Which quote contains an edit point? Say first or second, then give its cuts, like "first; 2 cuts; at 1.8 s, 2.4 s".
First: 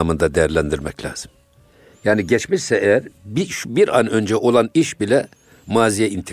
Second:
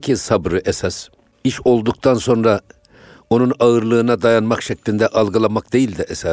first; 1 cut; at 4.7 s